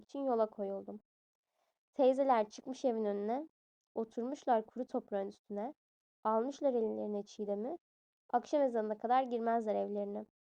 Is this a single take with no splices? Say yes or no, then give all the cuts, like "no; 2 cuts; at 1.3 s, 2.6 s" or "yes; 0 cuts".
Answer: yes; 0 cuts